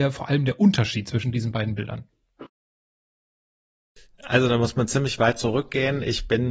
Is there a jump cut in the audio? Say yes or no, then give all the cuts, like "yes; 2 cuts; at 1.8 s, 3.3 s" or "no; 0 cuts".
no; 0 cuts